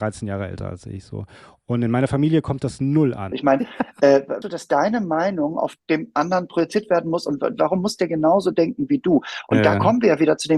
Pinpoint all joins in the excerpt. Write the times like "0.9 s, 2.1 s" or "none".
3.3 s, 4.4 s